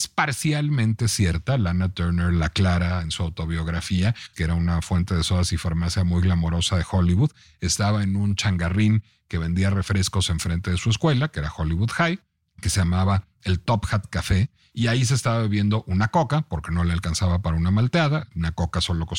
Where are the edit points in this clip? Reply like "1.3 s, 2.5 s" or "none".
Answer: 4.3 s